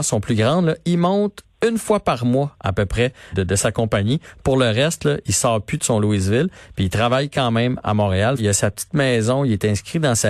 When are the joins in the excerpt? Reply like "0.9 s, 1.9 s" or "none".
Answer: 3.3 s, 8.4 s